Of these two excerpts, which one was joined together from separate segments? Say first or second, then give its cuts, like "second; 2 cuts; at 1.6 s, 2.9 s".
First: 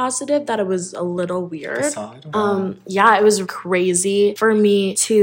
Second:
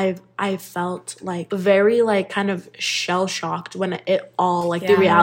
first; 2 cuts; at 2.3 s, 3.4 s